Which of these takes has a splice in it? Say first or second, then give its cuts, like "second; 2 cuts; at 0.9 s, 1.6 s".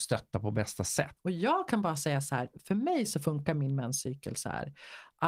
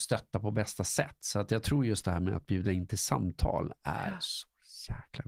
first; 1 cut; at 1.2 s